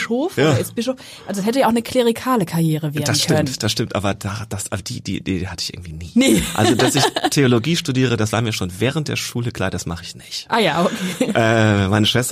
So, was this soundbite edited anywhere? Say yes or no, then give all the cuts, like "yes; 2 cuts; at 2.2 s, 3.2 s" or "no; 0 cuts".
no; 0 cuts